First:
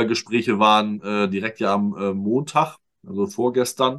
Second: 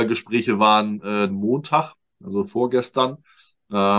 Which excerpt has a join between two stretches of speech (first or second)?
second